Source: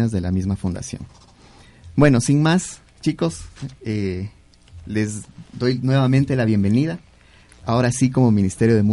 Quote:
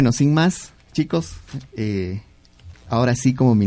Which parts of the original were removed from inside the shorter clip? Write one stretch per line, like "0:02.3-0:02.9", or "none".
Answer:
0:04.8-0:07.5